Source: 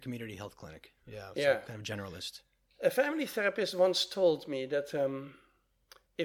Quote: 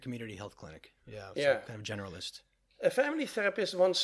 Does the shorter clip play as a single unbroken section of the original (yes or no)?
yes